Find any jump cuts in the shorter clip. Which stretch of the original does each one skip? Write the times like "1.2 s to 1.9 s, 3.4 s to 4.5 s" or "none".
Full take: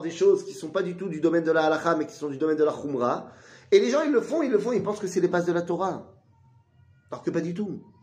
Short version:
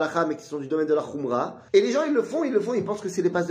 3.4 s to 3.7 s